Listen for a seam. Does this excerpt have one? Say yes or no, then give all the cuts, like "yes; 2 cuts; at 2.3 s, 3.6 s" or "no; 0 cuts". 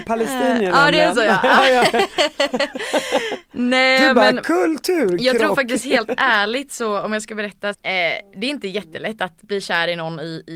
yes; 1 cut; at 7.7 s